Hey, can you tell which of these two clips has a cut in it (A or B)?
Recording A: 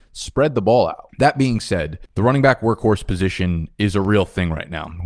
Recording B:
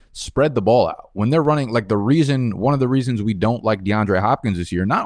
A